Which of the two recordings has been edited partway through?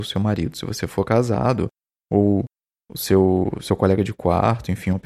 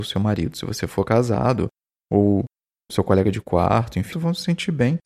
second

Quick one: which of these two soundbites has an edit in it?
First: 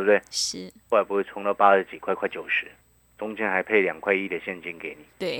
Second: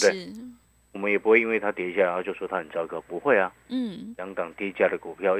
second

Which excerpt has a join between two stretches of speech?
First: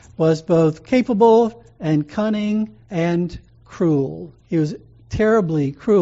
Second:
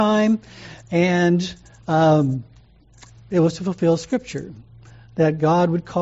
first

